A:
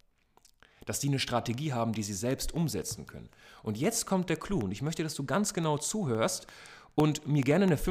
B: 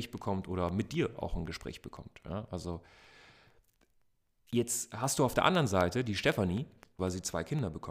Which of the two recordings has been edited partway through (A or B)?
B